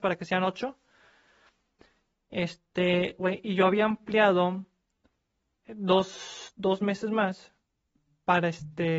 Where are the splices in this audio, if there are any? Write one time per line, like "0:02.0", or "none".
0:03.2